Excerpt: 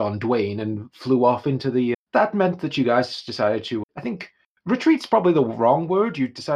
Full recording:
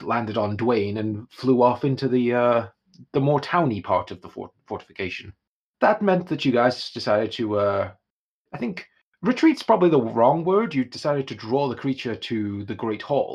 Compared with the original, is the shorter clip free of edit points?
no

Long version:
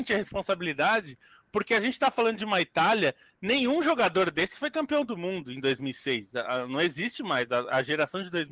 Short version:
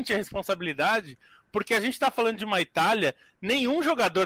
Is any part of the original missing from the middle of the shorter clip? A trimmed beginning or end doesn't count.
no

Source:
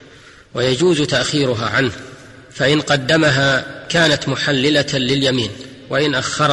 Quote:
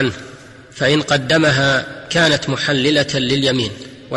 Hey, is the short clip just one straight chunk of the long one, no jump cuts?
yes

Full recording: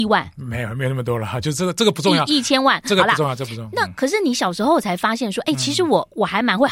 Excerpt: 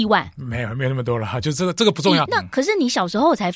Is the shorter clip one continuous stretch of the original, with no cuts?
no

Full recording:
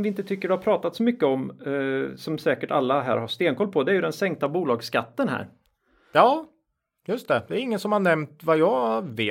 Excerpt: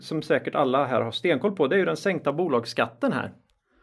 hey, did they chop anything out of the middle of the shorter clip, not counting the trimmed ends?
no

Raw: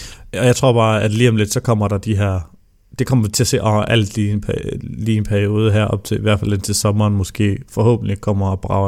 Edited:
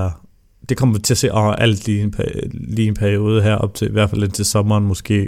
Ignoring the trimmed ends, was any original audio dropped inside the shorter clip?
no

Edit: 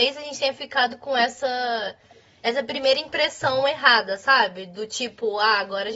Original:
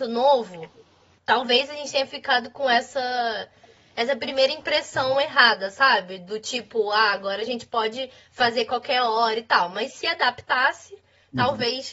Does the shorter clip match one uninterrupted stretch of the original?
yes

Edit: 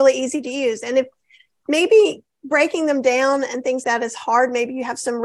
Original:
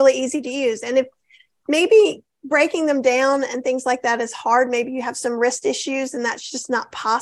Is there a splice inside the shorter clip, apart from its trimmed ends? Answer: yes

